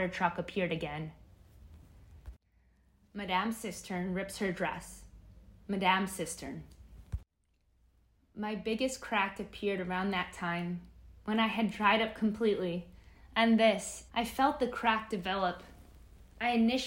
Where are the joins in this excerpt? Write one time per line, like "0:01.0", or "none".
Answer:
0:14.1